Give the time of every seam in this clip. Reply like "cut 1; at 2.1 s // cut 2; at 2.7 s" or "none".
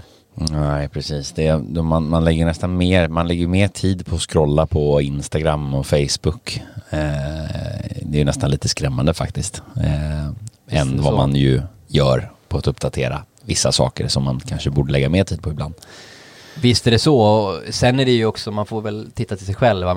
none